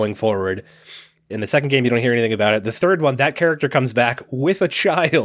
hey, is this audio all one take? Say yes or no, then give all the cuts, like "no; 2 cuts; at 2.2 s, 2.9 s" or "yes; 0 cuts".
no; 1 cut; at 1.3 s